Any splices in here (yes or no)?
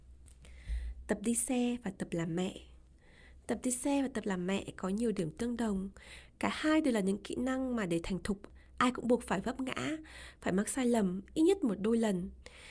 no